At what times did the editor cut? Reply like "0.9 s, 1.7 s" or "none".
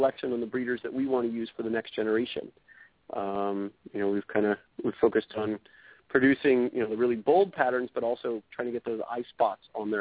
3.0 s